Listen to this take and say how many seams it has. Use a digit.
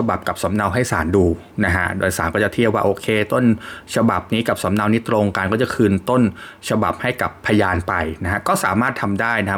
1